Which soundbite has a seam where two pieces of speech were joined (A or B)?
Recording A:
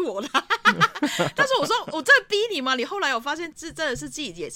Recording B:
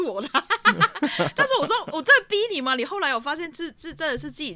A